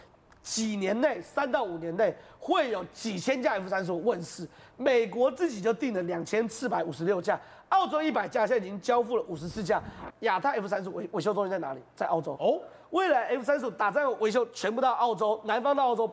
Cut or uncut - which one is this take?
cut